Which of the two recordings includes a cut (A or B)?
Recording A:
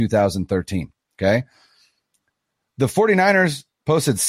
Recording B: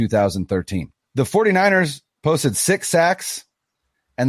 B